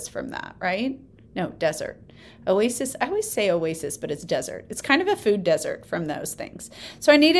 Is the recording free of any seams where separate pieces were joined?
yes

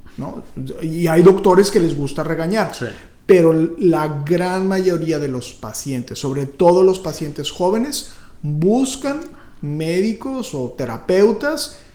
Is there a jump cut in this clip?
no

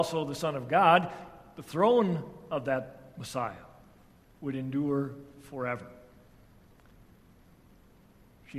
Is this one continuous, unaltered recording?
yes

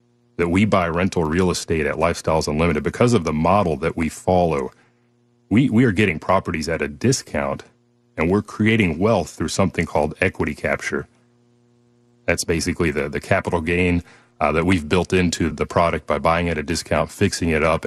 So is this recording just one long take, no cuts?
no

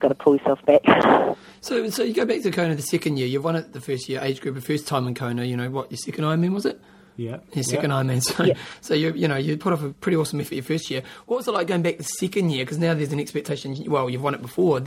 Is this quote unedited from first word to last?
yes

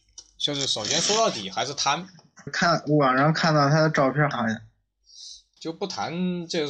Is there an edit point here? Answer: yes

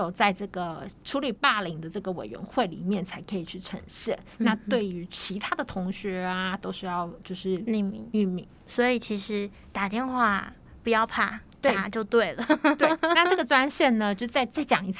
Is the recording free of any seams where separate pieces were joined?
yes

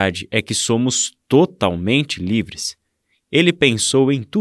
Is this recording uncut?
yes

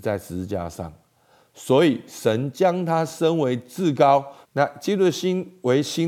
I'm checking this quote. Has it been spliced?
yes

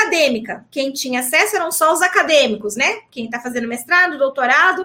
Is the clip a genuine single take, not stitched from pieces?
yes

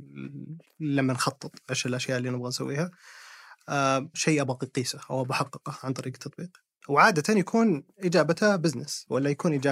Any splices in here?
yes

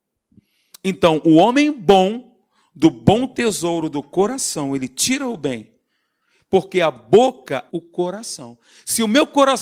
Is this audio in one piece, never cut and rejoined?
no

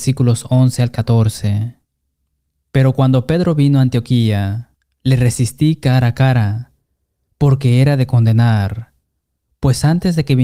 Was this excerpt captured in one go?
yes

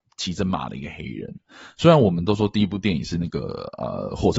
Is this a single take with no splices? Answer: yes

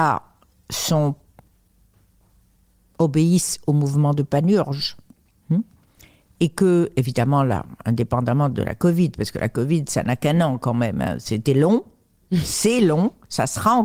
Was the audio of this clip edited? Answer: no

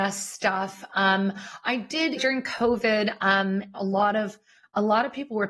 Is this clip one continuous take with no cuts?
no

